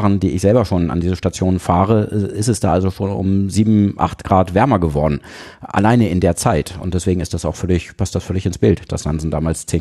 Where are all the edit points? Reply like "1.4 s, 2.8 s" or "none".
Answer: none

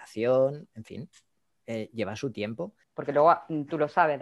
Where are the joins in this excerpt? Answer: 2.8 s

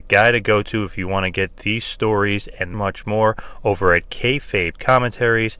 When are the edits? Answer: 2.7 s

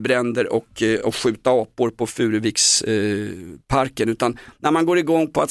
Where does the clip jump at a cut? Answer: none

